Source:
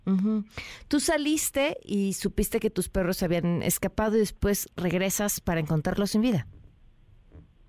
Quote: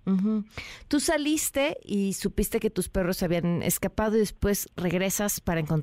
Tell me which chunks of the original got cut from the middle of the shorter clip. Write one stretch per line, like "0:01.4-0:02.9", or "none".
none